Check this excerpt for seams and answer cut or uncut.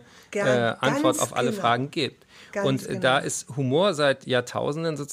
uncut